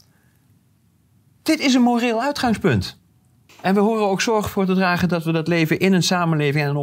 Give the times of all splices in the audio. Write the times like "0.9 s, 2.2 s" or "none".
3.5 s